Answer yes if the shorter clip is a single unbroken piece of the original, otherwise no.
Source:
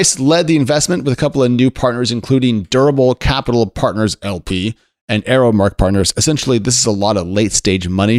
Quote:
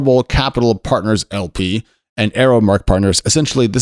yes